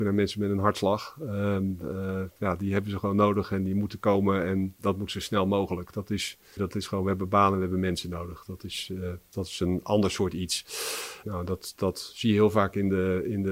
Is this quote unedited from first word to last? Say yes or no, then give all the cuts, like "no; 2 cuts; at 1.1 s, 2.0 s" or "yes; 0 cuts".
no; 2 cuts; at 6.6 s, 11.2 s